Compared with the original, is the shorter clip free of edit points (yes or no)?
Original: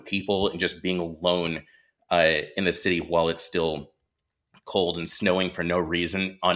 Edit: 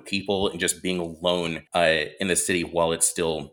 no